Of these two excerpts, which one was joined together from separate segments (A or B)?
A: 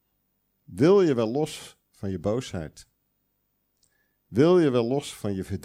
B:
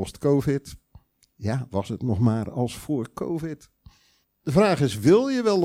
B